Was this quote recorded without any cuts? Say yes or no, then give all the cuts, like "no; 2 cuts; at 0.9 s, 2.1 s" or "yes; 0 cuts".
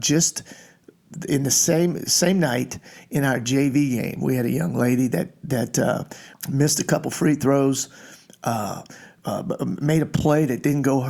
no; 1 cut; at 6.3 s